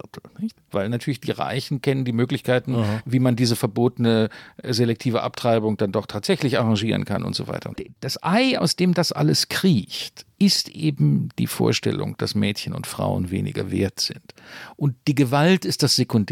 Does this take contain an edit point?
no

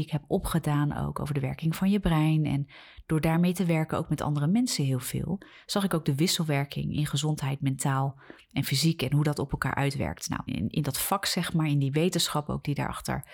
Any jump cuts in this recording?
yes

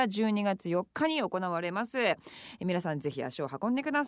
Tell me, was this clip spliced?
no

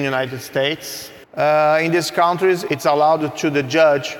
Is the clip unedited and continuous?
no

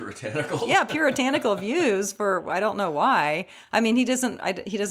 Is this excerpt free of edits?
yes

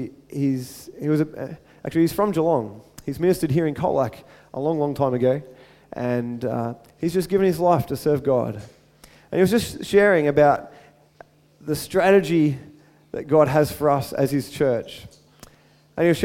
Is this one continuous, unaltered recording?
no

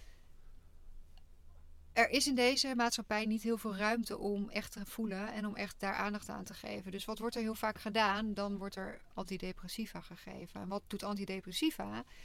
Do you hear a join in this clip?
no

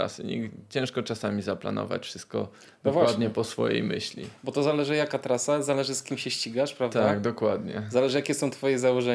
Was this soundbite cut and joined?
no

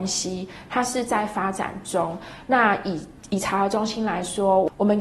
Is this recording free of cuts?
no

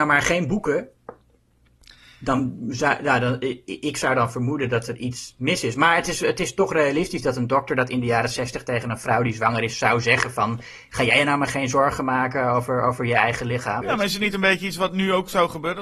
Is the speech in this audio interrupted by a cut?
yes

